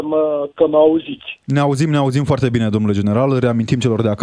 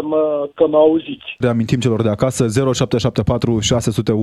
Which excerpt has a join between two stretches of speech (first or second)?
second